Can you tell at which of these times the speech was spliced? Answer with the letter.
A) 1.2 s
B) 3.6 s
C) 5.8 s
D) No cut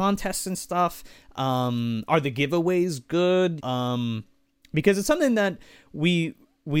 B